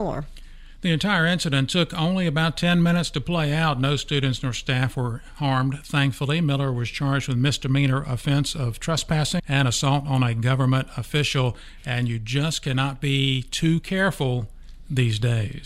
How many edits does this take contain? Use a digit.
1